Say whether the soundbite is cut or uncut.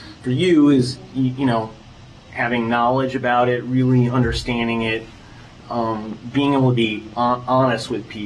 uncut